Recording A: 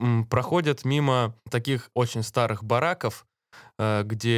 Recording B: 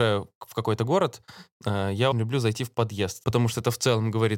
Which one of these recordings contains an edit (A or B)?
B